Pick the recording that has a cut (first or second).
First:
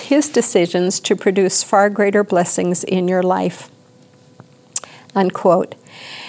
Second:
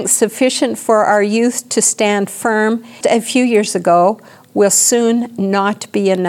second